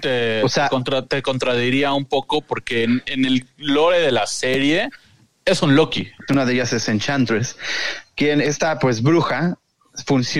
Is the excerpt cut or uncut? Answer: cut